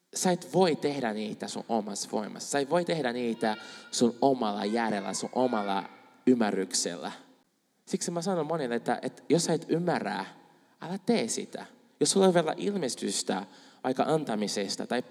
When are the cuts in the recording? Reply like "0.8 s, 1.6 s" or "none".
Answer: none

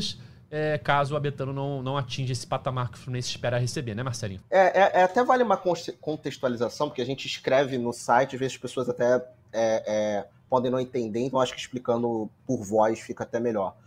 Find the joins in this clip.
4.4 s

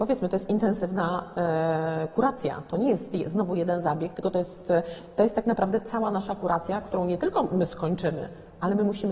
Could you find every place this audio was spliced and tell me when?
none

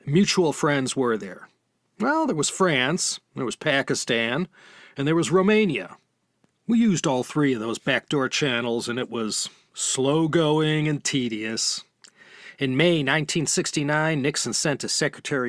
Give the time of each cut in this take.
none

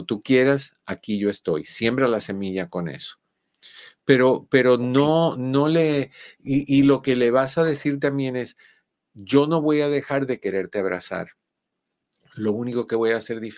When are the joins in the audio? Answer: none

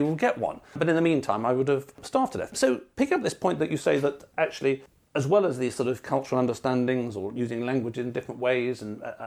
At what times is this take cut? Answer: none

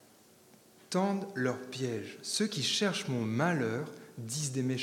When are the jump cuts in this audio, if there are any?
none

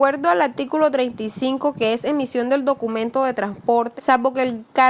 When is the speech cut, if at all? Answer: 4.0 s

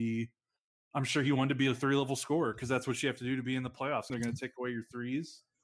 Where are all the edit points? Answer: 4.1 s

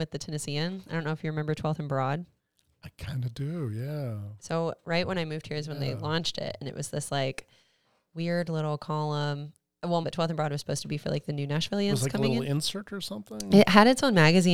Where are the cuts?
10.0 s

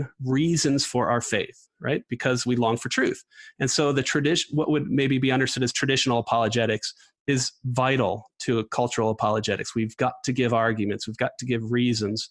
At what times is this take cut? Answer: none

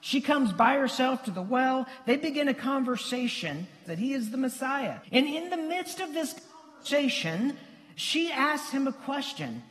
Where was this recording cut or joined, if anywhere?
3.9 s, 5.0 s

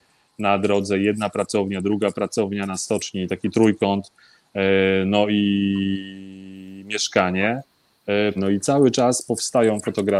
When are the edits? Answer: 8.4 s

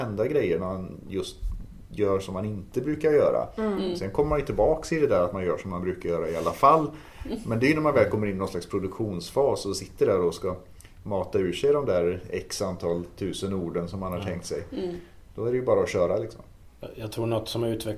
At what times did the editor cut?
none

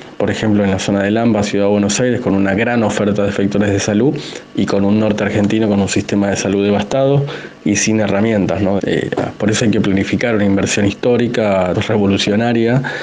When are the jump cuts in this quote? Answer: 8.8 s, 11.7 s

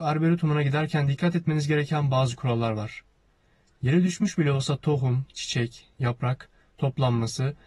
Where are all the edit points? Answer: none

